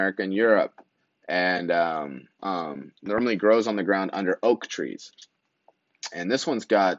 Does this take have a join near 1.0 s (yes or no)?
no